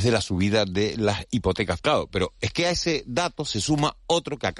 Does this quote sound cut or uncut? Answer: cut